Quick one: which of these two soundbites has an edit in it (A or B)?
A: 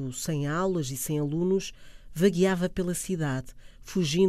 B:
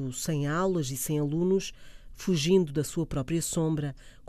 B